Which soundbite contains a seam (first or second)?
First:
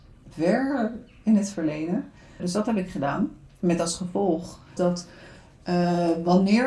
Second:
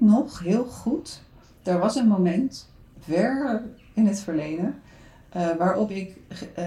first